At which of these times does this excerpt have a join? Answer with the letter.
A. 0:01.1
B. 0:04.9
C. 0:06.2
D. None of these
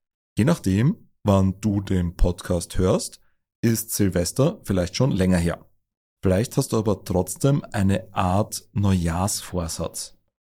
D